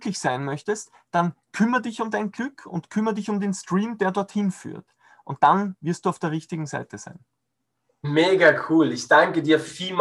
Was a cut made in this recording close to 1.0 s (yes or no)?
no